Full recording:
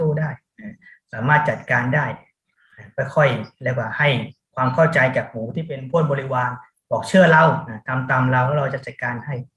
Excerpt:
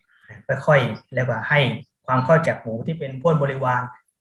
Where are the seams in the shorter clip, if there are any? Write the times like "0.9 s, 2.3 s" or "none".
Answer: 2.4 s